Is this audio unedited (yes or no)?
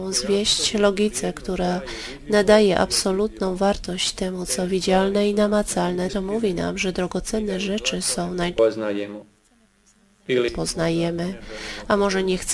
no